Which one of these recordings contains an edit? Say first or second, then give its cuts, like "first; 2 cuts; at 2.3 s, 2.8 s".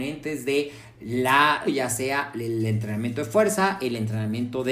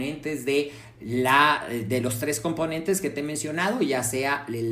first; 1 cut; at 1.6 s